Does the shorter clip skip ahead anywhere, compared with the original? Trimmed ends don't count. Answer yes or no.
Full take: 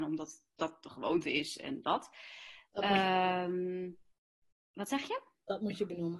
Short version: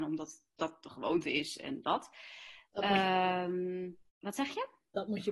yes